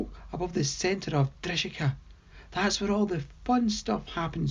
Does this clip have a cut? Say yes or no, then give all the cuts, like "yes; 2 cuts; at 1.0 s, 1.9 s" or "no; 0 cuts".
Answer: no; 0 cuts